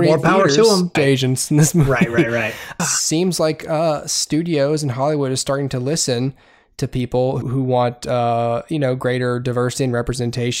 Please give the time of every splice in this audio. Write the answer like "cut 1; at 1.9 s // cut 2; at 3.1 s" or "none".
cut 1; at 1.0 s // cut 2; at 2.8 s // cut 3; at 7.4 s